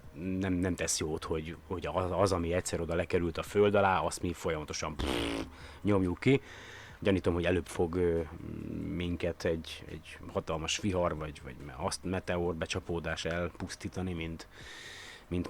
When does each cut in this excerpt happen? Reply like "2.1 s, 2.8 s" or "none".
7.0 s